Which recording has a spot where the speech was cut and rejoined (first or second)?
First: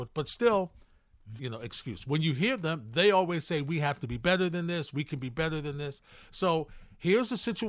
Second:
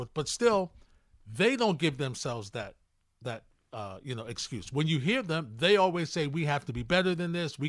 first